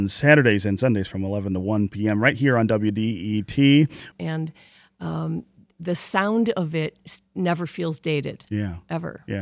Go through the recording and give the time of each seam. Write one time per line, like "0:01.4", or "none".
0:04.1